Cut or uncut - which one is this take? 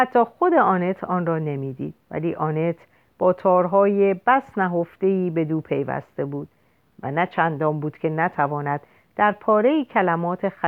cut